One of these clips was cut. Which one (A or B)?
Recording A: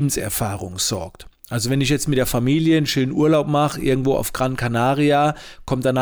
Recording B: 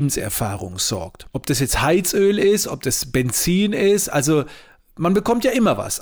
B